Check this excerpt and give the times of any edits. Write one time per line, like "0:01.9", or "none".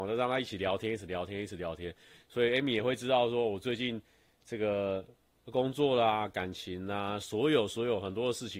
none

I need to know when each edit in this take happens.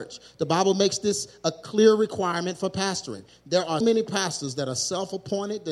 0:03.8

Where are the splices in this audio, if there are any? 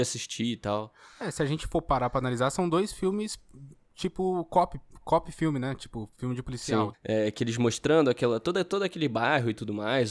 0:06.9

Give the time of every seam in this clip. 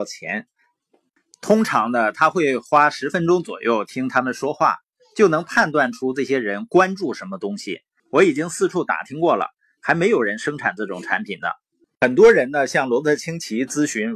0:08.0
0:11.8

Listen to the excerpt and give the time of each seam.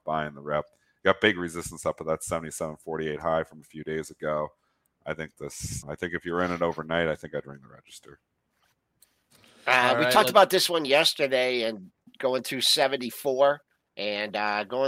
0:05.8

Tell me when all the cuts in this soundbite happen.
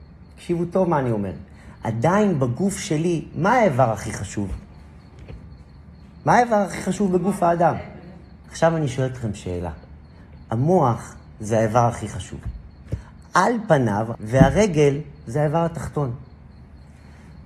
0:08.4
0:14.1

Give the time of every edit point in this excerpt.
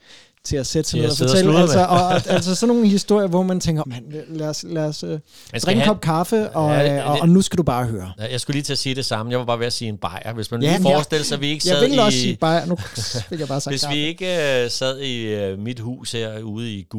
0:03.8
0:10.8

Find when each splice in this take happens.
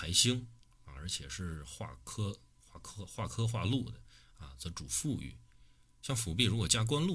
none

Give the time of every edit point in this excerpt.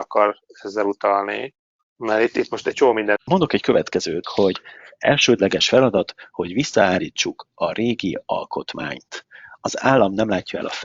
0:03.2
0:04.2

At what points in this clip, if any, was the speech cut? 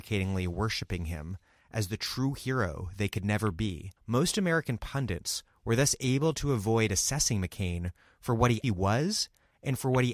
0:04.0
0:08.6

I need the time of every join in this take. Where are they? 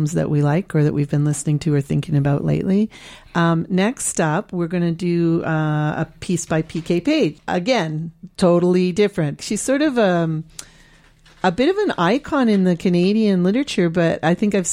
0:07.3
0:09.4

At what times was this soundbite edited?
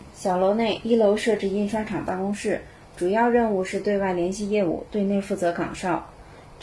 none

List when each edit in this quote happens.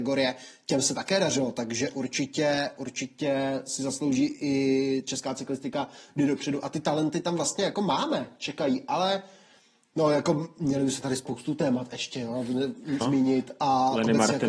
0:13.0

